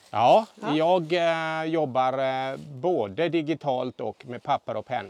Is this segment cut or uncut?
uncut